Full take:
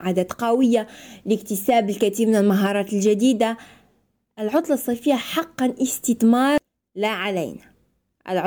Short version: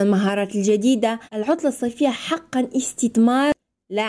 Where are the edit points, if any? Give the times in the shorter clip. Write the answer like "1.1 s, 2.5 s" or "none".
1.3 s